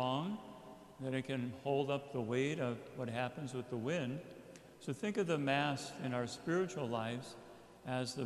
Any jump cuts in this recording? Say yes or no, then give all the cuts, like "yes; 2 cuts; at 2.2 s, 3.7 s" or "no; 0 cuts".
no; 0 cuts